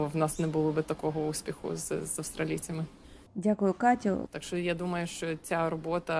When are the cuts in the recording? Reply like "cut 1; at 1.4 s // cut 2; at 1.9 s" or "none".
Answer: cut 1; at 4.3 s